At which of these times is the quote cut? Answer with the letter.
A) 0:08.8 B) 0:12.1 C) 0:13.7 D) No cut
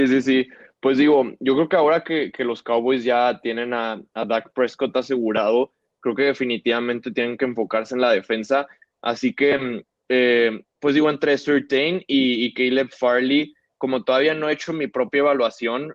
A